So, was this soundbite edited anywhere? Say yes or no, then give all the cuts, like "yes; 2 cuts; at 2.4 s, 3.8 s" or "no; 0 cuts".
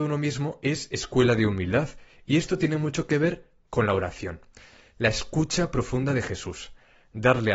no; 0 cuts